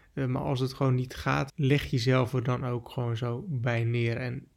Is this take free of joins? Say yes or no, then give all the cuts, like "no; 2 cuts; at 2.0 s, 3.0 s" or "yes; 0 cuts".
no; 1 cut; at 1.5 s